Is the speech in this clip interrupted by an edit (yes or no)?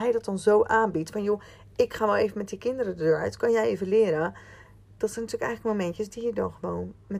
no